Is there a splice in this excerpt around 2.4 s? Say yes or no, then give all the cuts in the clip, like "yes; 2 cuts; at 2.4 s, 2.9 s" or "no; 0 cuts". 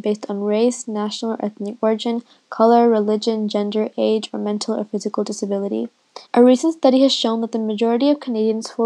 no; 1 cut; at 6.3 s